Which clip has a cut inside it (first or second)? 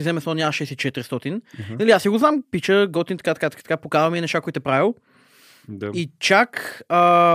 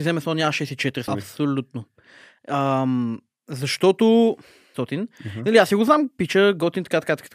second